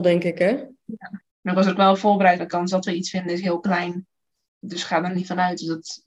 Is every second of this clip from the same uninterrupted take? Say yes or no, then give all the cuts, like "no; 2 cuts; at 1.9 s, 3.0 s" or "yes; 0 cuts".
no; 2 cuts; at 1.3 s, 2.4 s